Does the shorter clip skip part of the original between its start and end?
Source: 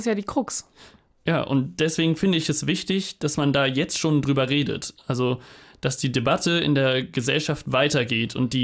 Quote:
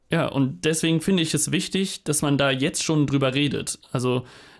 no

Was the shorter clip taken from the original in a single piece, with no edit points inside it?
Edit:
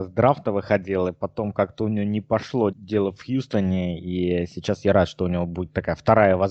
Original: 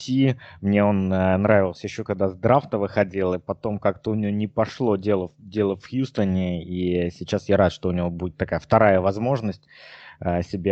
no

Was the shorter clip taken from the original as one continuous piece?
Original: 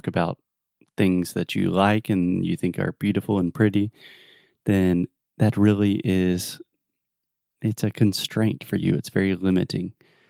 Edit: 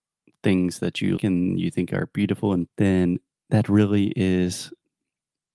no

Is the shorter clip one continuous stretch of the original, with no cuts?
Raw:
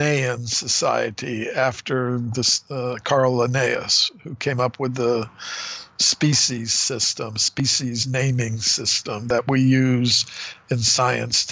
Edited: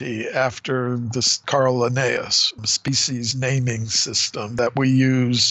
no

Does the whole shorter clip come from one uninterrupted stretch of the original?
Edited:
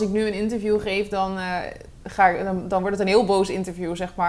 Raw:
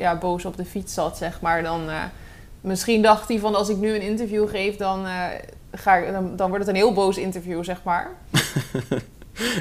yes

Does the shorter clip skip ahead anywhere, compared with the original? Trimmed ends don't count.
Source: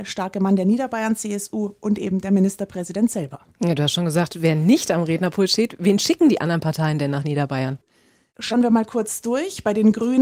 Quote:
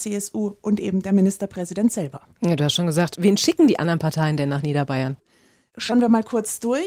yes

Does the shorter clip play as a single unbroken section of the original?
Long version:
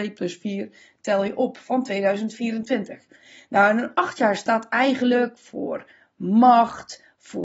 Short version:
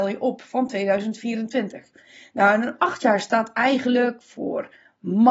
yes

